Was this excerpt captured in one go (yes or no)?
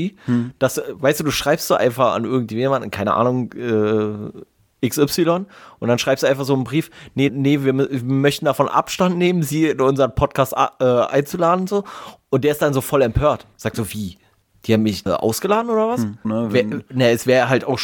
no